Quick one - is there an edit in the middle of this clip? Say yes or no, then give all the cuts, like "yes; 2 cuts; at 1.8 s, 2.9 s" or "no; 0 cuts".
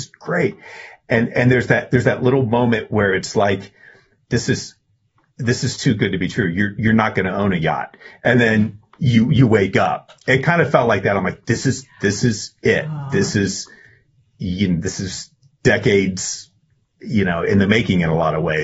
yes; 1 cut; at 4.3 s